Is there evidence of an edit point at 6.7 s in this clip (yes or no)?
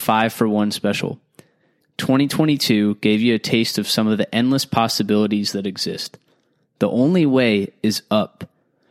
no